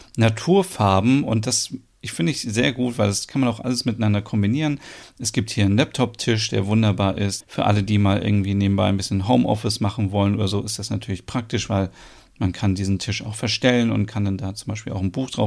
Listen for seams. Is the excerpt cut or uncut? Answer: cut